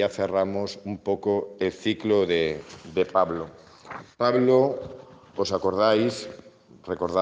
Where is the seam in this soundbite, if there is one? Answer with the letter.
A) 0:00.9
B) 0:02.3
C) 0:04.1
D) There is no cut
C